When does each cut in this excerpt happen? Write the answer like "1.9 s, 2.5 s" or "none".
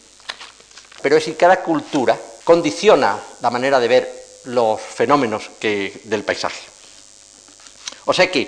1.0 s, 2.4 s